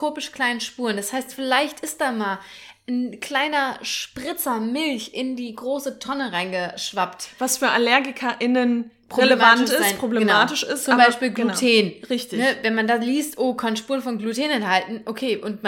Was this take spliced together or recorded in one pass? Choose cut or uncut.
uncut